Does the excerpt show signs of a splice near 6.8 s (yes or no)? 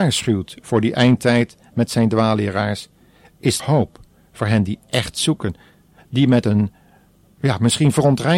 no